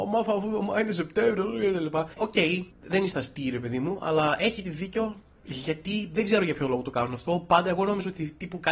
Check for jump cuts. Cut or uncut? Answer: cut